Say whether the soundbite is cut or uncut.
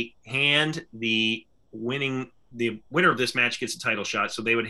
cut